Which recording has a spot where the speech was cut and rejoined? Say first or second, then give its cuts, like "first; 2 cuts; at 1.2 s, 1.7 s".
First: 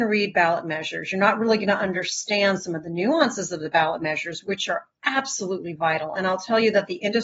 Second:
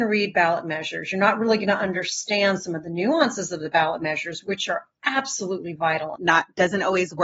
second; 1 cut; at 6.2 s